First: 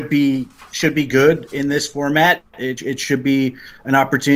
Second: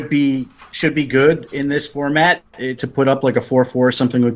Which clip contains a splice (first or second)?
second